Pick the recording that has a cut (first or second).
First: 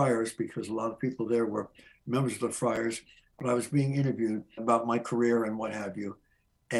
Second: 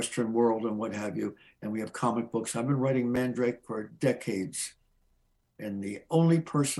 first